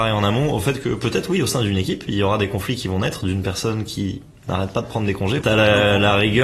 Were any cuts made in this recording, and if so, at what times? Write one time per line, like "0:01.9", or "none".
0:05.4